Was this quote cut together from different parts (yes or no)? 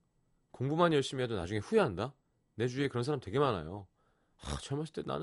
no